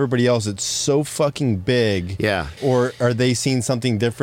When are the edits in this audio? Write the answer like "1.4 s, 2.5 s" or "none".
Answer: 2.6 s

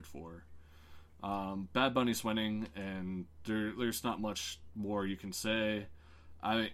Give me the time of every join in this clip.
none

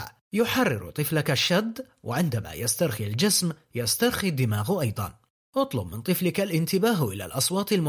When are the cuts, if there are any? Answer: none

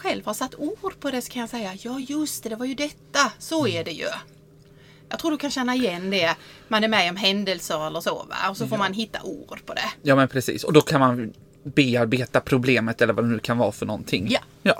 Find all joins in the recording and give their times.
none

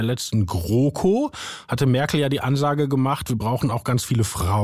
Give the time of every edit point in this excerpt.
none

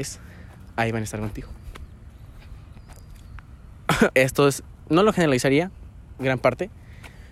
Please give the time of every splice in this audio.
4.1 s

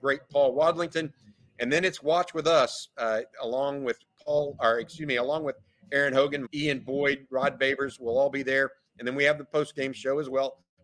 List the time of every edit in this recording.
6.5 s

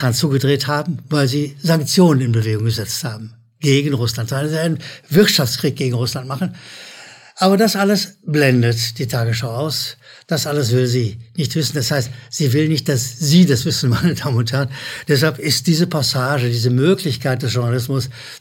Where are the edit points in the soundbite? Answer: none

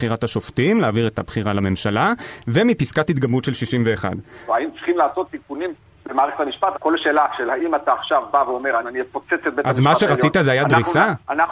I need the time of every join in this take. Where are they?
4.5 s, 6.7 s, 8.8 s

